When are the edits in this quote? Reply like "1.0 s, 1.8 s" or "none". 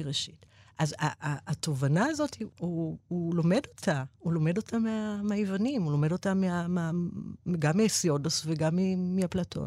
2.5 s